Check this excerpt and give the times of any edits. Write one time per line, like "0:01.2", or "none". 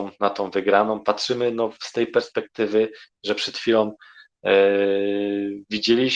none

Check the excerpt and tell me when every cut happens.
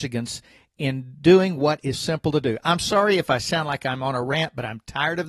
0:01.9

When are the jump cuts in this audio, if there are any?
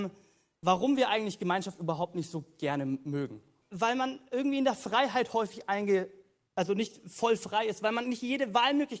0:03.6

